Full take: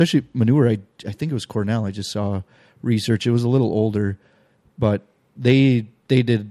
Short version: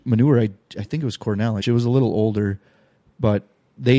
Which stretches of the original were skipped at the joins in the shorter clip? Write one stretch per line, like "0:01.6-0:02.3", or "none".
0:01.9-0:03.2

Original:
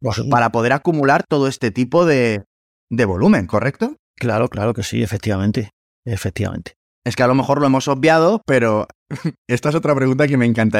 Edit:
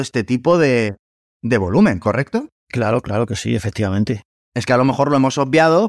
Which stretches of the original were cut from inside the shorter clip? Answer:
0:05.9-0:06.9

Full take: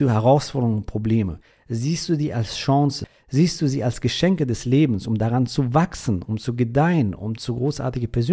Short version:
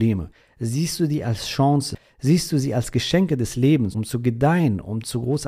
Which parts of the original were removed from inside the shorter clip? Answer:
0:05.0-0:06.2

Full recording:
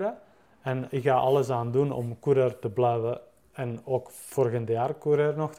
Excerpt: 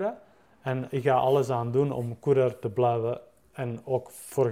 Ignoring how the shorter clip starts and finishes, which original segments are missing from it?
none

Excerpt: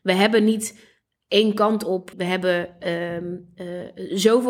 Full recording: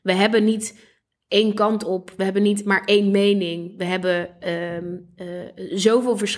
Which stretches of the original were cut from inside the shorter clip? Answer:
0:02.1-0:03.7

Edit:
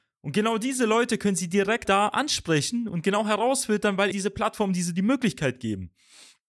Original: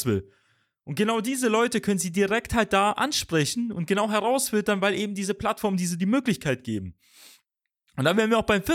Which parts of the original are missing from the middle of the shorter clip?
0:02.5-0:02.7
0:04.9-0:05.1

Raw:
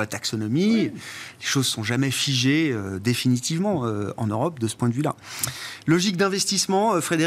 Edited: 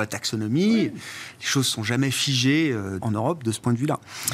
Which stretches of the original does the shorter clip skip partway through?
0:03.0-0:04.2

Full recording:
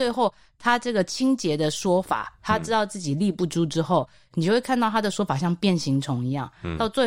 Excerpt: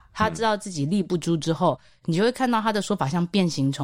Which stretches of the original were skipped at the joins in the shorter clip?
none

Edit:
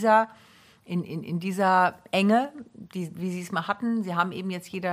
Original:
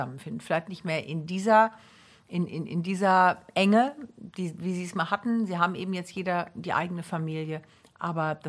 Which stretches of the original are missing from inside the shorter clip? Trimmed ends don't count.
none

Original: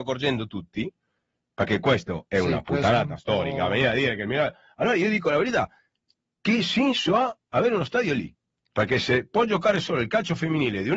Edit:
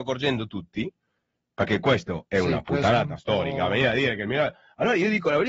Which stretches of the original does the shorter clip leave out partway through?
none

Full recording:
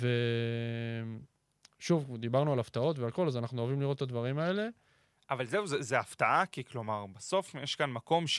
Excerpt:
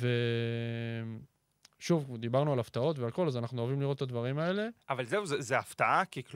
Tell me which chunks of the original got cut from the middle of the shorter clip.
0:04.8-0:05.2

